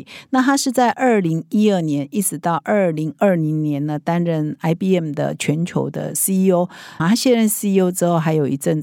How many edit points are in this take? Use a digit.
1